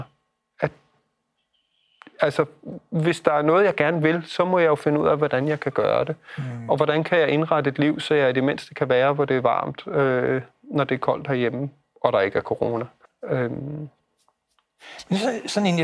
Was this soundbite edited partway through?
yes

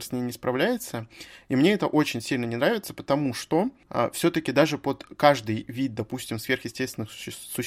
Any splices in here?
no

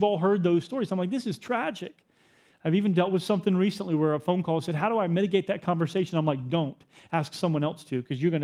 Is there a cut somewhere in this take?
no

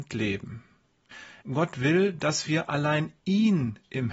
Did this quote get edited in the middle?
yes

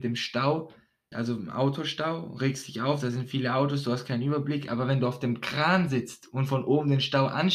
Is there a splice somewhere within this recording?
yes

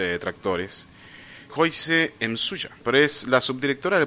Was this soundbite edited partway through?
yes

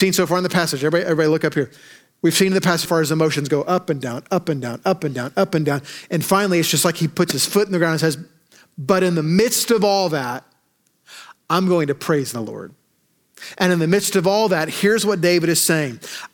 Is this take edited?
yes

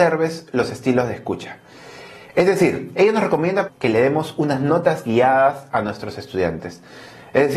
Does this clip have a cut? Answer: yes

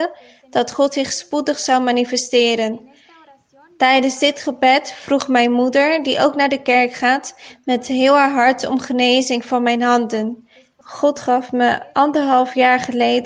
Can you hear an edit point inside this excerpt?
yes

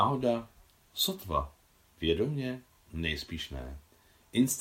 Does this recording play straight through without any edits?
yes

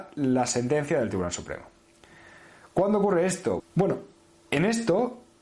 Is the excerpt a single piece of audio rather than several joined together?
no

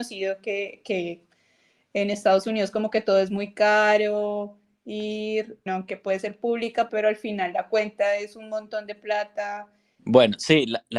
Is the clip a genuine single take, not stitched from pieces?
no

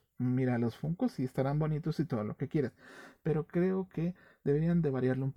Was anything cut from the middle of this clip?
no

